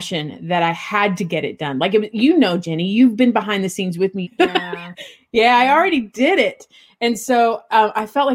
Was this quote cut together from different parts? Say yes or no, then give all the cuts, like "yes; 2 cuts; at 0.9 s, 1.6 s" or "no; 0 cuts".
yes; 1 cut; at 4.2 s